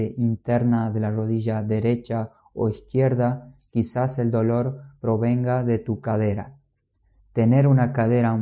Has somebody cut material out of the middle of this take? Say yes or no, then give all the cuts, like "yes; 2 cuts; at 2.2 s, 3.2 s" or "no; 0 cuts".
no; 0 cuts